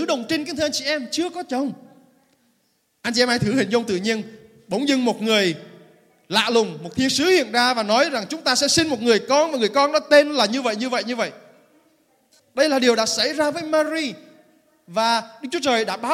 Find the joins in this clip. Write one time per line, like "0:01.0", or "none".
0:12.4